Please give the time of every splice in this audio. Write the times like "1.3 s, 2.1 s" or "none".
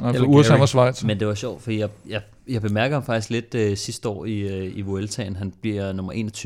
none